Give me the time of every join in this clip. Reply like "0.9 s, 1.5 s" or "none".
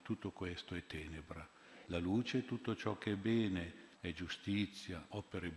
1.8 s, 3.9 s